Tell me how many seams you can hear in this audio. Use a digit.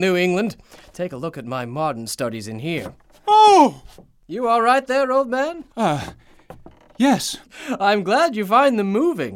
2